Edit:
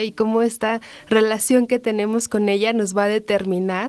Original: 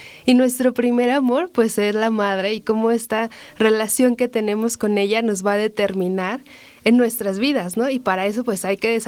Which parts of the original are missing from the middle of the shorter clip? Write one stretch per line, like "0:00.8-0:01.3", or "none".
none